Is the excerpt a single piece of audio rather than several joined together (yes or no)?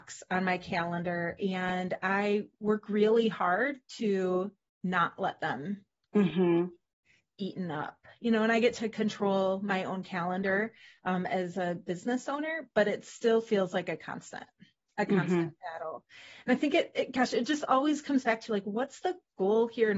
yes